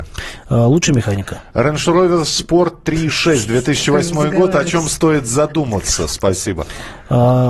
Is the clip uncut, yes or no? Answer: yes